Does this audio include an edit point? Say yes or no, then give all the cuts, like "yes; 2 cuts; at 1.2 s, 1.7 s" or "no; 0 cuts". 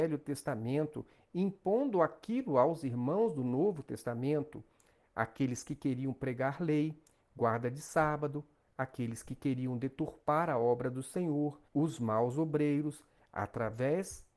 yes; 2 cuts; at 11.7 s, 13.2 s